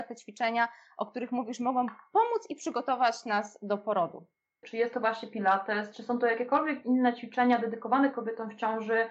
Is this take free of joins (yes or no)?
no